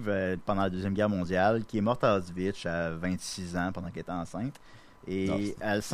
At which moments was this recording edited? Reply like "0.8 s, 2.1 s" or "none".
none

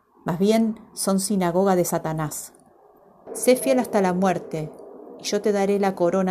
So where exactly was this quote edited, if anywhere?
3.3 s

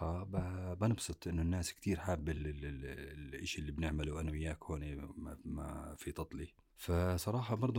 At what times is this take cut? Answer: none

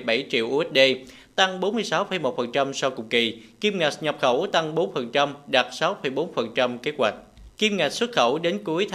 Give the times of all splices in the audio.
7.5 s

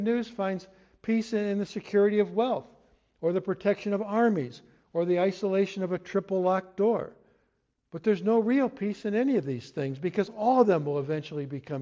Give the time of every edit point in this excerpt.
none

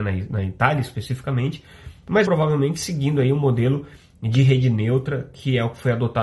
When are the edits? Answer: 2.2 s

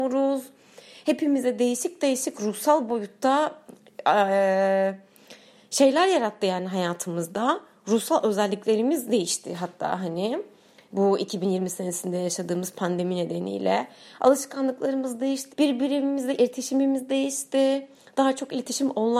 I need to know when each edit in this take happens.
15.5 s

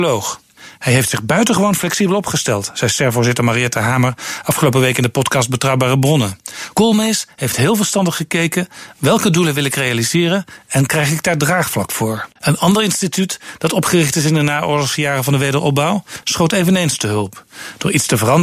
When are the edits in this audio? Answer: 12.4 s, 16.2 s

